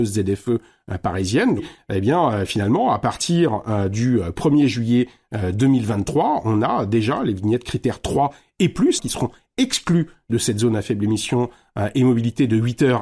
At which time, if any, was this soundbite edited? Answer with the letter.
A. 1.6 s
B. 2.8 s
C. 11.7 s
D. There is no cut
A